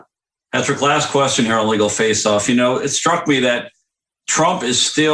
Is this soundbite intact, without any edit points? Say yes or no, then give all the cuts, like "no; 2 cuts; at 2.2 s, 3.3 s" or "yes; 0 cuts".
yes; 0 cuts